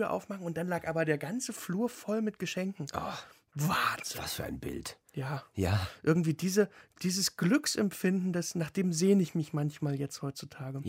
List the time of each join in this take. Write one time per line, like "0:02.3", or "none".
none